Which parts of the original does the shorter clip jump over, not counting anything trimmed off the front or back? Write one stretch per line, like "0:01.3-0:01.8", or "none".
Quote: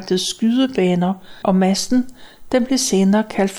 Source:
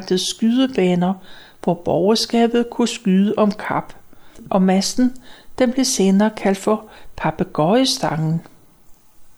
0:01.4-0:04.5